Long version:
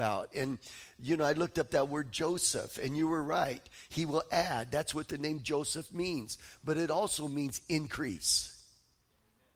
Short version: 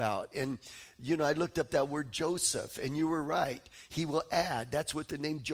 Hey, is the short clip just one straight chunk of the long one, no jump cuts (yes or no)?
yes